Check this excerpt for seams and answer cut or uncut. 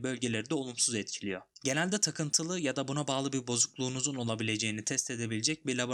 uncut